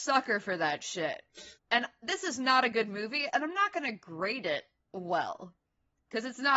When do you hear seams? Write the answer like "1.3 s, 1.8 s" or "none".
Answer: 1.6 s, 3.3 s